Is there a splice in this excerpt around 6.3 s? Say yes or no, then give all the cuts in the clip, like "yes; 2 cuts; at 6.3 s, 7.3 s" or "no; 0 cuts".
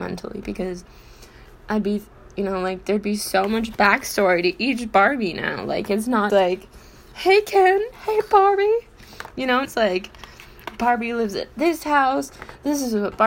yes; 2 cuts; at 6.3 s, 9.6 s